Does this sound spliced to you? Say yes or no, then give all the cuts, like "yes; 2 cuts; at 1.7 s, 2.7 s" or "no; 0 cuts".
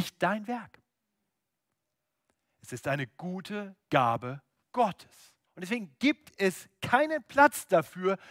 yes; 1 cut; at 5.5 s